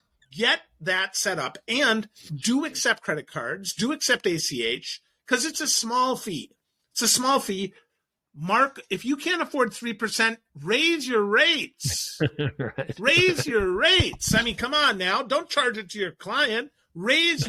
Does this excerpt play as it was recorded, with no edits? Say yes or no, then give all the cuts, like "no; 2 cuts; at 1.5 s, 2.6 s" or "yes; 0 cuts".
yes; 0 cuts